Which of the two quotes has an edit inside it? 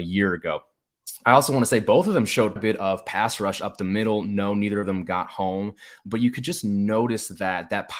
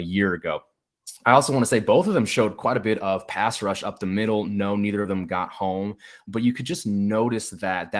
first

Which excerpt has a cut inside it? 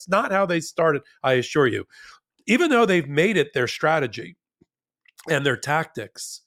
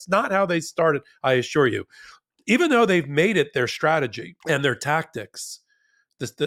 second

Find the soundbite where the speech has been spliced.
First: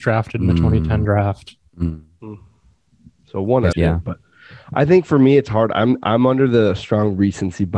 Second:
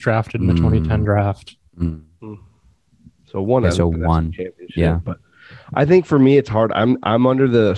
first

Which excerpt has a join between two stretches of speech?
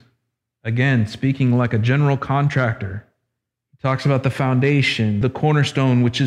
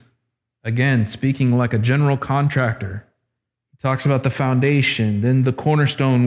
first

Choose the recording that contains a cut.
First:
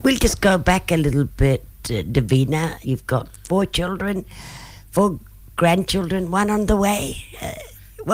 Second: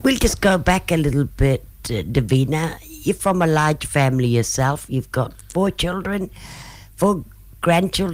first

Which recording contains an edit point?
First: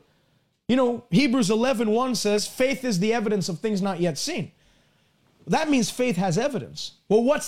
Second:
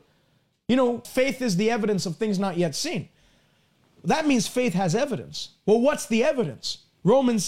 second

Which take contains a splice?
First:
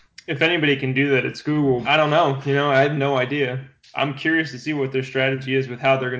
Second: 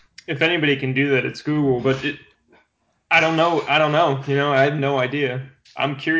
first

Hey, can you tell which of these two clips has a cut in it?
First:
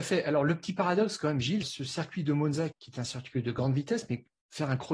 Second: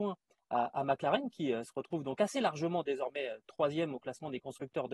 first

